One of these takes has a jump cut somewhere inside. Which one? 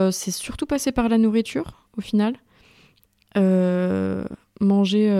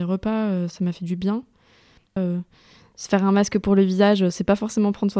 second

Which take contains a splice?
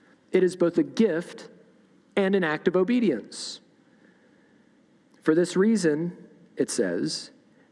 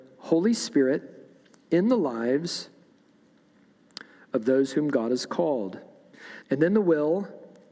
second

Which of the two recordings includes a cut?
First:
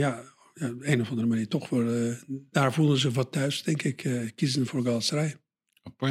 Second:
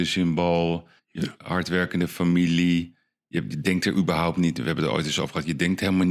second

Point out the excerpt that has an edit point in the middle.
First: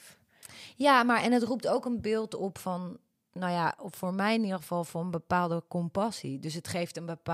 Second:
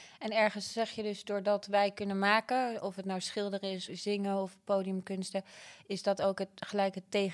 second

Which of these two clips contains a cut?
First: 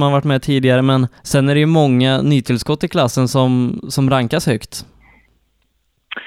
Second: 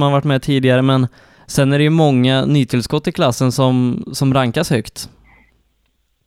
first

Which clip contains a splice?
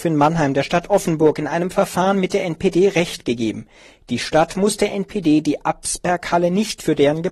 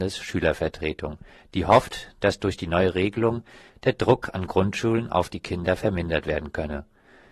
second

